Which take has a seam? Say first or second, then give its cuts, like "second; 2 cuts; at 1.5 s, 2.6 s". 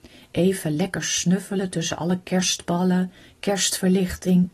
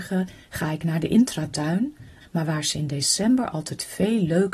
second; 1 cut; at 2.2 s